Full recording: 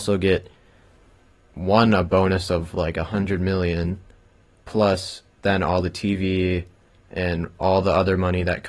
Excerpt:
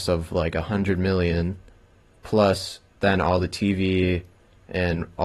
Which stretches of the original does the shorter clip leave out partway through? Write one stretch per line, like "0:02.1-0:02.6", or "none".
none